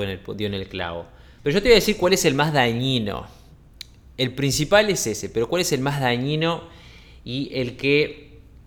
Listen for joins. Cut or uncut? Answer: cut